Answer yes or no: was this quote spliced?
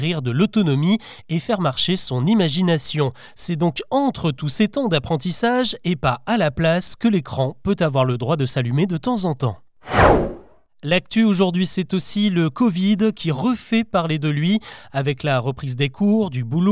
no